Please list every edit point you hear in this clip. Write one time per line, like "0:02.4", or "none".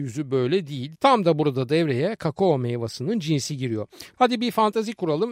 0:00.9
0:04.1